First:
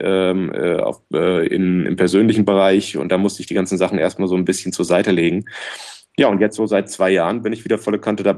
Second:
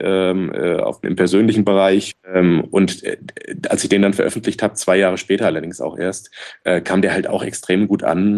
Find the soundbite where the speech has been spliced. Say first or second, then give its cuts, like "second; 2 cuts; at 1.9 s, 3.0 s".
second; 2 cuts; at 1.0 s, 2.1 s